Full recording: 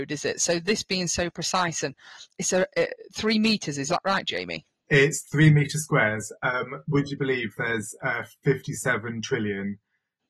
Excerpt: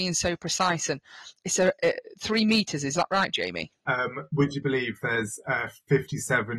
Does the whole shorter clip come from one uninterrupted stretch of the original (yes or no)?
no